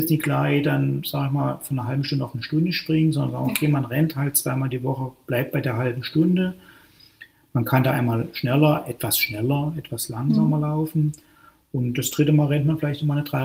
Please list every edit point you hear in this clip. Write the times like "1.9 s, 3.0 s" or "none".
none